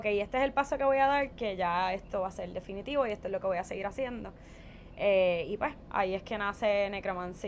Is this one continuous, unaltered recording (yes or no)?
yes